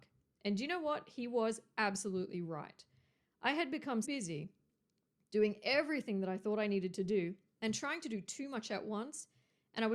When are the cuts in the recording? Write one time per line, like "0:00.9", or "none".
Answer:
0:04.0